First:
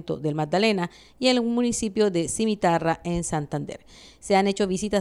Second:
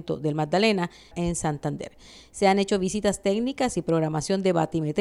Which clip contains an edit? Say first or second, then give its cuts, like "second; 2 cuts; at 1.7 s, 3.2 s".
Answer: second; 1 cut; at 1.1 s